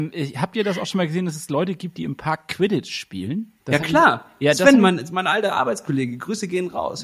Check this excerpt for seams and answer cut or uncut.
cut